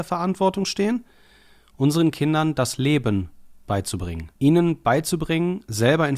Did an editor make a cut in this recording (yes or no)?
yes